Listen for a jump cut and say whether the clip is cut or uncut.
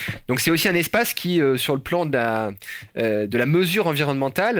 uncut